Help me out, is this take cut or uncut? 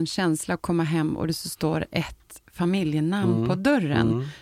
uncut